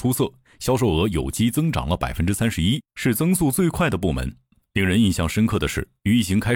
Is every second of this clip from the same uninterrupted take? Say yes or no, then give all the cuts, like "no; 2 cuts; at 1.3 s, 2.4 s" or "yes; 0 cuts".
yes; 0 cuts